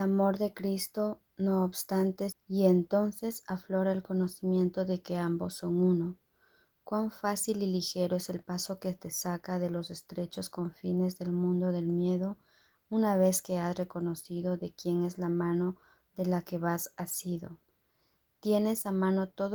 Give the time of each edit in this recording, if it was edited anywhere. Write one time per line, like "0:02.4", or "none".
0:02.3